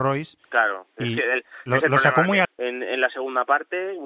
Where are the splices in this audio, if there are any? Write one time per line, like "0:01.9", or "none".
0:02.4